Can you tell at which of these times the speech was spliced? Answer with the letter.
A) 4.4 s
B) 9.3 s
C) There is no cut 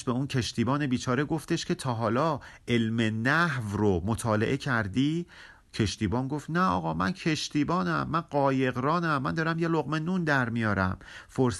C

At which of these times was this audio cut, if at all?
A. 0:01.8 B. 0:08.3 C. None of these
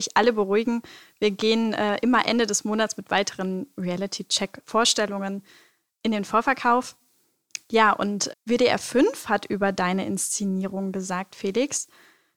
B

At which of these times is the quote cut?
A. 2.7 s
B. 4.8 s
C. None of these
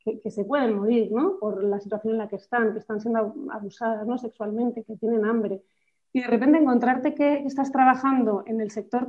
B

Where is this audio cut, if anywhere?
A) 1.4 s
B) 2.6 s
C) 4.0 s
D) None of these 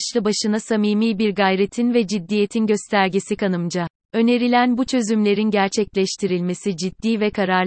C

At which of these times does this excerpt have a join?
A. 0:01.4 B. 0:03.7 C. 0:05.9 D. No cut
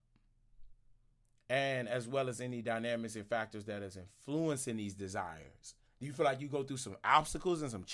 C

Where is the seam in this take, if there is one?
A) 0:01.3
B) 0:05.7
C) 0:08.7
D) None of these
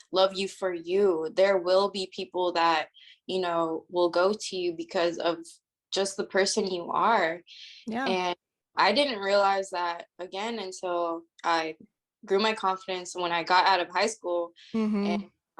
C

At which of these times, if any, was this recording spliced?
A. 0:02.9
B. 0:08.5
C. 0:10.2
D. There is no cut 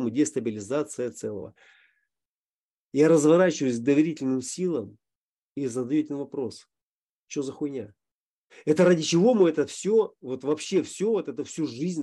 B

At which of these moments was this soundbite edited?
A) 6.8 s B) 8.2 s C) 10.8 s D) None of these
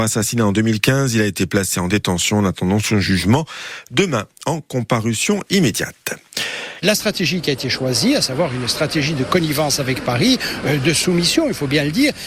A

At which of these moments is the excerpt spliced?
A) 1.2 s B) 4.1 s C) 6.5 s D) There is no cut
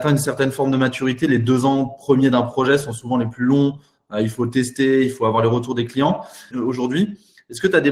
C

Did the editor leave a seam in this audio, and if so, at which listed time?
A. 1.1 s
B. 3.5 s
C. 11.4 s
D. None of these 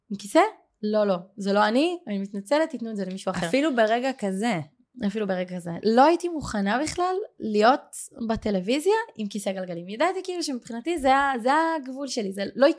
D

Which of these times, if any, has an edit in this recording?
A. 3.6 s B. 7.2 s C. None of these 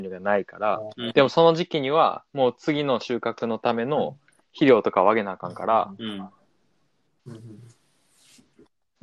B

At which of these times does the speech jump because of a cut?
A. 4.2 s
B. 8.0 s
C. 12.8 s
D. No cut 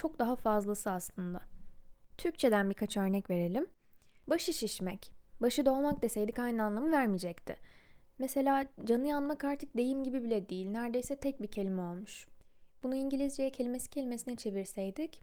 B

